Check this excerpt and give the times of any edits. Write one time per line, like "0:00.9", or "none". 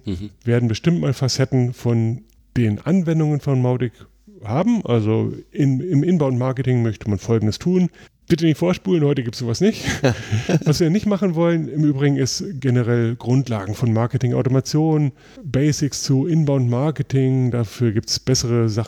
0:08.1